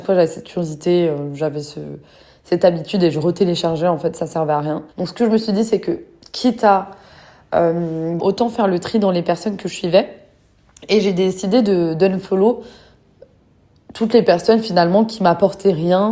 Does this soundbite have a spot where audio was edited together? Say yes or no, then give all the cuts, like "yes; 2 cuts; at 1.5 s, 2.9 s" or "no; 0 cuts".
yes; 2 cuts; at 4.9 s, 8.2 s